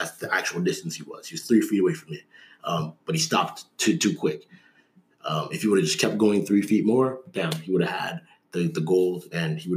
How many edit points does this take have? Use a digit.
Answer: 0